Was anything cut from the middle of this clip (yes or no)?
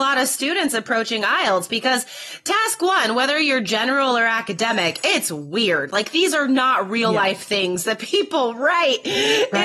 no